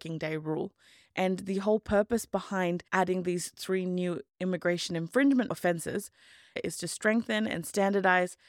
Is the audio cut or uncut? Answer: cut